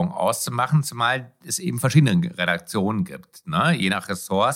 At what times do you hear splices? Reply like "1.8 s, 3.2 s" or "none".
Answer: none